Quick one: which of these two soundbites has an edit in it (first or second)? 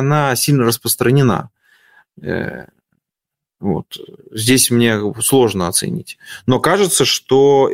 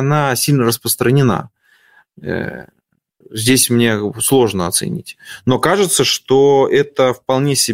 second